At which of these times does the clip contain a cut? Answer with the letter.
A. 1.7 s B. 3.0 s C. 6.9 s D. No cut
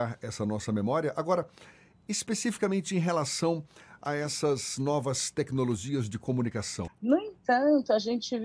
C